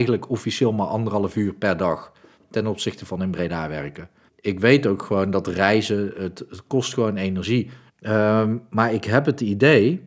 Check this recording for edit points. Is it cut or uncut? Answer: cut